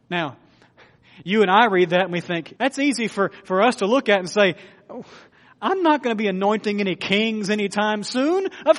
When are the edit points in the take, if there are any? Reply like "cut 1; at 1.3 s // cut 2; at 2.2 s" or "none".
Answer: cut 1; at 2.6 s